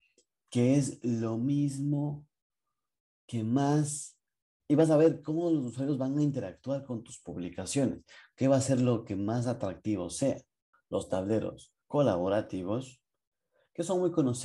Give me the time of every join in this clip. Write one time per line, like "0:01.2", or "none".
0:10.7
0:11.8

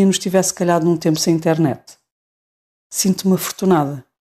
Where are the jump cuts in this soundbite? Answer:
0:02.8

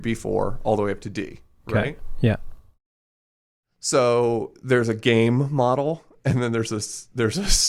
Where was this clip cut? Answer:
none

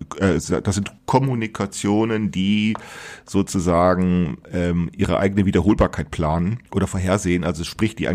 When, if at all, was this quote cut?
0:01.0

